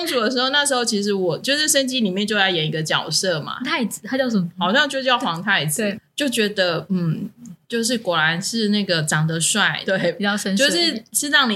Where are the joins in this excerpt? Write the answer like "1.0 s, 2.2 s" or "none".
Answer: 3.6 s, 9.9 s